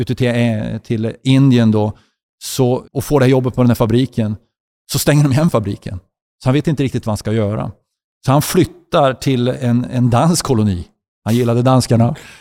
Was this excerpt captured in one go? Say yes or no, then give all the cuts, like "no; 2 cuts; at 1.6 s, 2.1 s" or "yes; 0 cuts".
no; 1 cut; at 2.8 s